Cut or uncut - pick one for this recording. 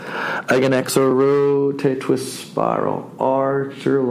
uncut